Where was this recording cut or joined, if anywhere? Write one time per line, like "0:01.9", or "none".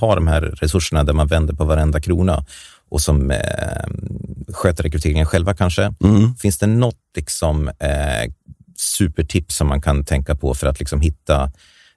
none

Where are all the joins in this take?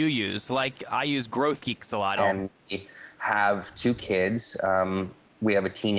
0:02.2

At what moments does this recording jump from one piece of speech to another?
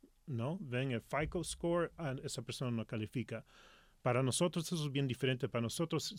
none

